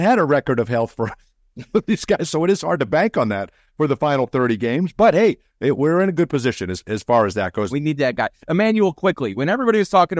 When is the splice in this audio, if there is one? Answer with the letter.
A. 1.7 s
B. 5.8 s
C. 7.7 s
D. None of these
C